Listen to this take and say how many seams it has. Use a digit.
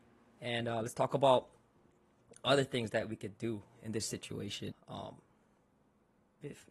1